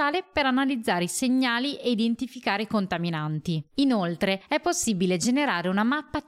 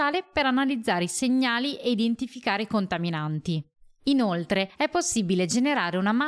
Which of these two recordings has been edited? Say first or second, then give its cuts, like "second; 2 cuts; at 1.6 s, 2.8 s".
first; 1 cut; at 3.7 s